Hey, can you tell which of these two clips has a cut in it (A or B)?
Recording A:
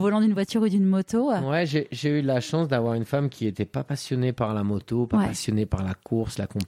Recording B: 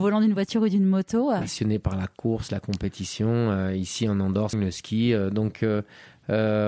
B